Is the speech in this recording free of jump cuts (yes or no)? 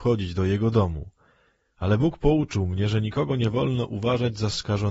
yes